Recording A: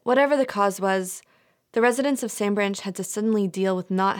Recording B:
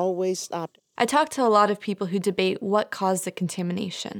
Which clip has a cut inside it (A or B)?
B